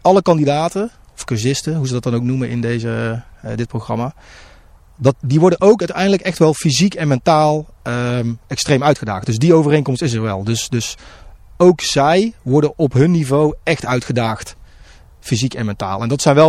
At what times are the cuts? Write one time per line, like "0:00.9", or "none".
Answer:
0:05.1